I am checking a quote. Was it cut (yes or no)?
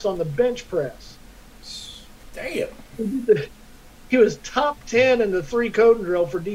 no